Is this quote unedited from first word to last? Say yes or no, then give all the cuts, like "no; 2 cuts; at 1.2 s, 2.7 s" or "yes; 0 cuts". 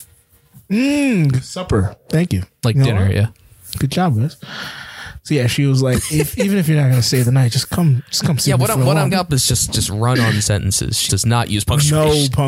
no; 2 cuts; at 9.1 s, 11.1 s